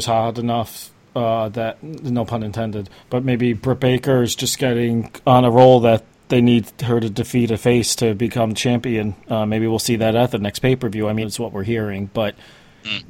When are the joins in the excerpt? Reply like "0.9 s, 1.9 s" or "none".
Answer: 3.0 s, 11.2 s